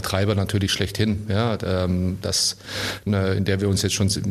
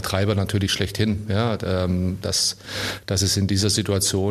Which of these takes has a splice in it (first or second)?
first